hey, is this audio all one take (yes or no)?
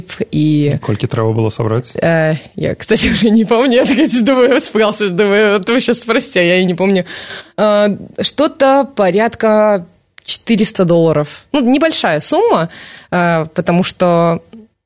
yes